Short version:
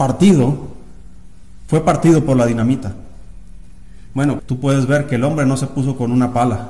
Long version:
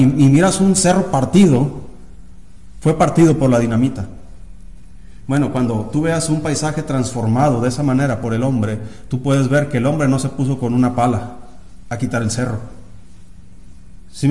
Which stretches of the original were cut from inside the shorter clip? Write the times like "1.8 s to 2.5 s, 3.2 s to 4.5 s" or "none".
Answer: 5.5 s to 9.0 s